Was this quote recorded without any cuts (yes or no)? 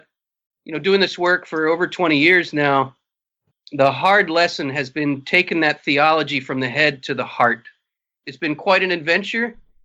no